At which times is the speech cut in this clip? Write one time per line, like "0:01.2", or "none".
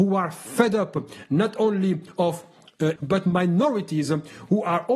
0:03.0